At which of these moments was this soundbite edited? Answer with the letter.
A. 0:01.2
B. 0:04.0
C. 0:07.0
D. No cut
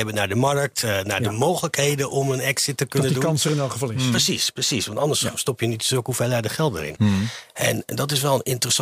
C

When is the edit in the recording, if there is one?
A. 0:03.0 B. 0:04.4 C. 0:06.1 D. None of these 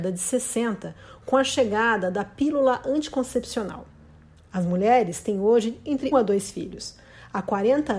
C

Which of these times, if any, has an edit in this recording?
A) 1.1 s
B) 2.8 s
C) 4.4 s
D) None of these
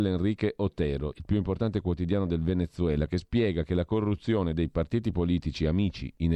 A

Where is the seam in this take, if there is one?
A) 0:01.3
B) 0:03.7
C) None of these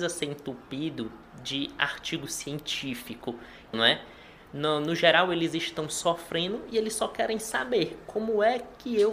B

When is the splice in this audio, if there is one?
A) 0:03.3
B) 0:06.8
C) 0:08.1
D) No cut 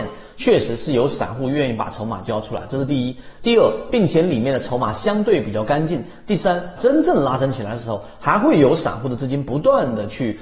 B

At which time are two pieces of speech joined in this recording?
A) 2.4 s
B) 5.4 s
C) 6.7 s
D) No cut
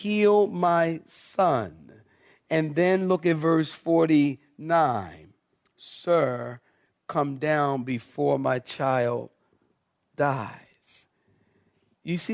D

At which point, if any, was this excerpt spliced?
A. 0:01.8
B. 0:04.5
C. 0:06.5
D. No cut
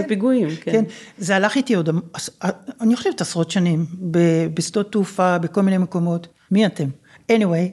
C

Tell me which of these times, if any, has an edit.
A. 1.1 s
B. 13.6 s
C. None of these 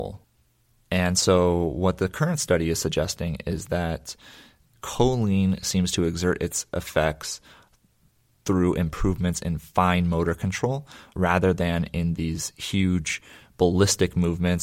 C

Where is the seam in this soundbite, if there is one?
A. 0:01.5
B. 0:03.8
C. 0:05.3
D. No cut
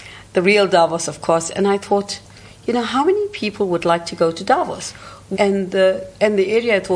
C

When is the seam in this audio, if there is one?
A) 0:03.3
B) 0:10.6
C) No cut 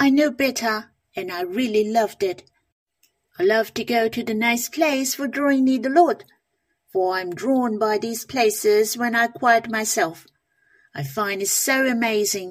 C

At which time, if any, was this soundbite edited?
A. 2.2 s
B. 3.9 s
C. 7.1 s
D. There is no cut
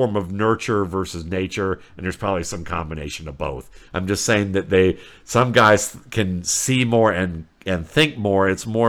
B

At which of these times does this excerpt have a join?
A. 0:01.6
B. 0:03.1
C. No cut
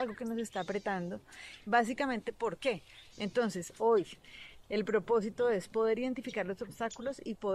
B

